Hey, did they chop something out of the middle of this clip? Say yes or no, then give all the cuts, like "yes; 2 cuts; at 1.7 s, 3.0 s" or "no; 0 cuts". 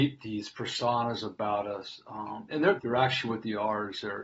yes; 1 cut; at 2.8 s